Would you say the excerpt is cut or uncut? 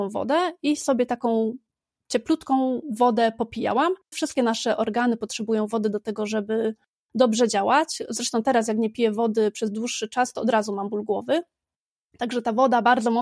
cut